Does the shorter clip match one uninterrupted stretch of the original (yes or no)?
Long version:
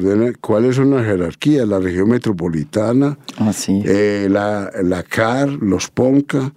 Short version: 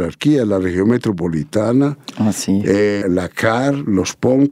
no